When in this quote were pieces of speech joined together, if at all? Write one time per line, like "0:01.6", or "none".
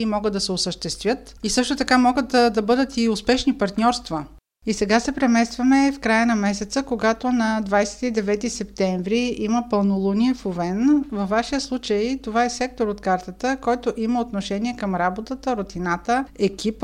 none